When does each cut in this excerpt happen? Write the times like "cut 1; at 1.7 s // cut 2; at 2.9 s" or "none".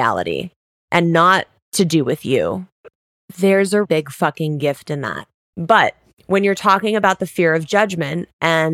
cut 1; at 3.8 s // cut 2; at 5.5 s